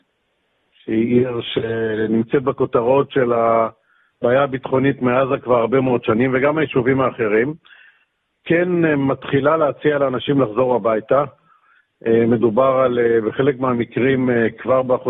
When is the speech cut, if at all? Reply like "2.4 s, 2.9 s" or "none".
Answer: 8.3 s